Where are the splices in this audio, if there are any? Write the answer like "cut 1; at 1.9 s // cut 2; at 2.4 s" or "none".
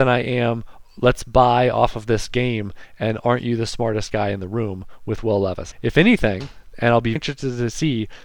cut 1; at 5.7 s // cut 2; at 7.2 s